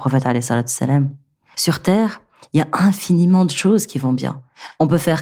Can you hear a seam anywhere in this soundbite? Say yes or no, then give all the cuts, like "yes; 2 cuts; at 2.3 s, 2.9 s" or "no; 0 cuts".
yes; 1 cut; at 1.5 s